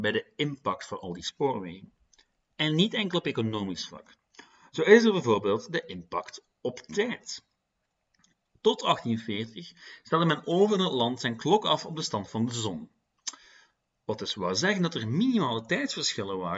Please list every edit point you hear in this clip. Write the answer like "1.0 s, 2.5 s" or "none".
none